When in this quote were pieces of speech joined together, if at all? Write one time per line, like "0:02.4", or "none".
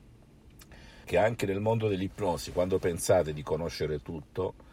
0:01.0

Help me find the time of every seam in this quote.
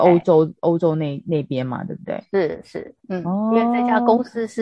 none

